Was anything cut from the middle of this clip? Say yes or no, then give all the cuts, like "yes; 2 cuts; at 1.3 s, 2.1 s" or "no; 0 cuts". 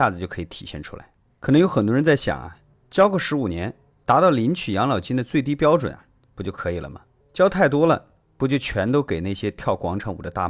no; 0 cuts